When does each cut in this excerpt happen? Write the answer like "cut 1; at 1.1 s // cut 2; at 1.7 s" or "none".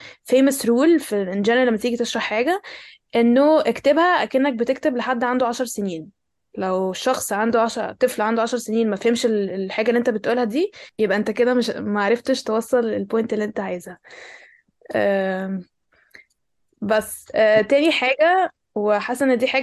none

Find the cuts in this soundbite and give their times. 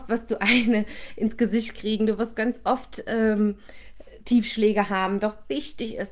none

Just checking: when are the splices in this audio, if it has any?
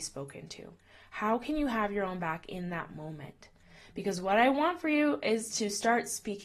none

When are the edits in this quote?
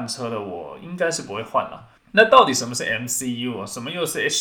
cut 1; at 2.0 s

